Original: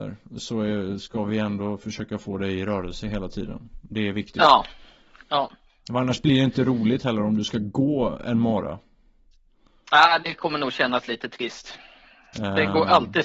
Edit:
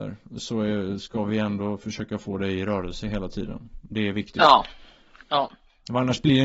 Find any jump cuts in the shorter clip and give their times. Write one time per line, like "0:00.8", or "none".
none